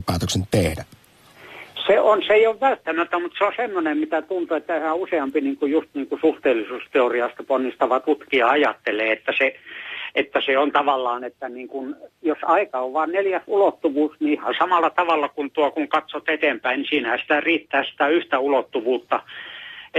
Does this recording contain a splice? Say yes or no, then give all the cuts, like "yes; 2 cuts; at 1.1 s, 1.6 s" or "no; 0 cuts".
no; 0 cuts